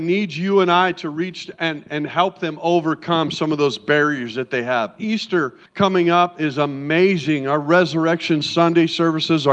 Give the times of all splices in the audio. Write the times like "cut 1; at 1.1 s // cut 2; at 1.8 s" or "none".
cut 1; at 5.7 s